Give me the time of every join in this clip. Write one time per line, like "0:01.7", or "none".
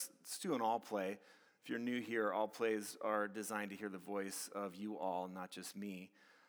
none

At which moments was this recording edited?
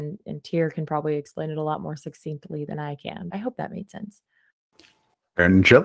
0:03.3

